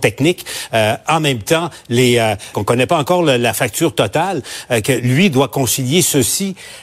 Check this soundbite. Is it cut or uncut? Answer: cut